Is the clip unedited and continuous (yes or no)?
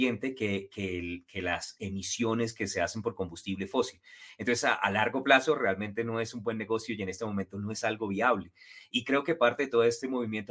yes